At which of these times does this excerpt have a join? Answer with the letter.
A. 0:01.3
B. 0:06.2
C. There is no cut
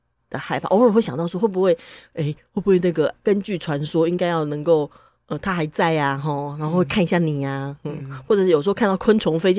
C